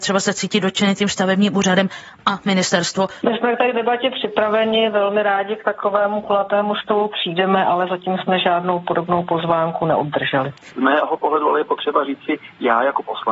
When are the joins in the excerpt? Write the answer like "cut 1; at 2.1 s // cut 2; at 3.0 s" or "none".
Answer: cut 1; at 3.2 s // cut 2; at 10.7 s